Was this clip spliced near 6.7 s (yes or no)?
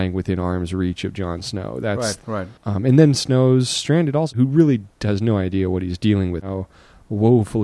no